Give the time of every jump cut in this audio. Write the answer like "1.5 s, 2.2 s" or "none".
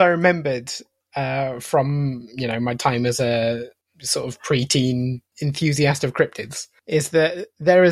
none